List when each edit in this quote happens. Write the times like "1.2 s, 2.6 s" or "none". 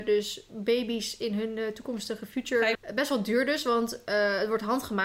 2.7 s